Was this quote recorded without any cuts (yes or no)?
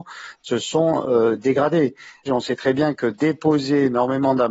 no